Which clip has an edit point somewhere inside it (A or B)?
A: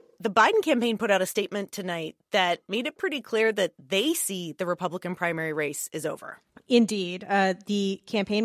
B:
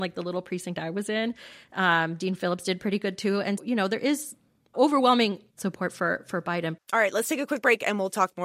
B